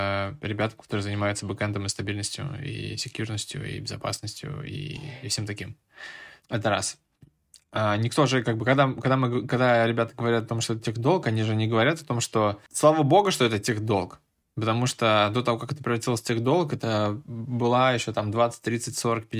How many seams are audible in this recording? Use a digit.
0